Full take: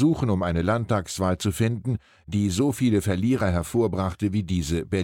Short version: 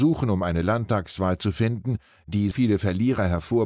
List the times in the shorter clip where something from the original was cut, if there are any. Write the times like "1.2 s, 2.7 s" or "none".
2.5 s